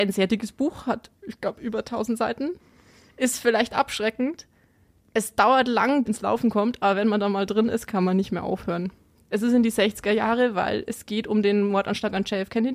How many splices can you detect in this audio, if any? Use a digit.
2